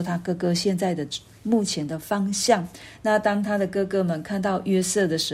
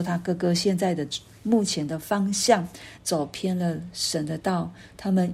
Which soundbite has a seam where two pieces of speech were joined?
second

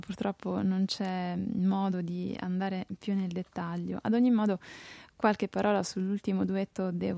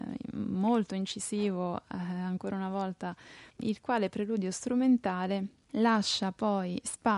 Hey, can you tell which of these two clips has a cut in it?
second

